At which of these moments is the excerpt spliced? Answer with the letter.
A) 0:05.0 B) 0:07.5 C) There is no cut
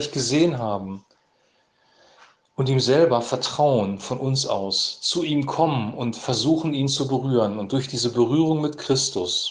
C